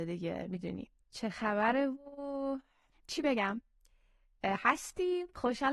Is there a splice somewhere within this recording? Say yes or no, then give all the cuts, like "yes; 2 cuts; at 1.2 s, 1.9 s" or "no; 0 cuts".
yes; 1 cut; at 1.0 s